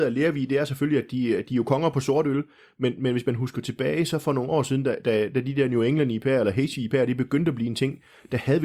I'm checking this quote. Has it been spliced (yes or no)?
no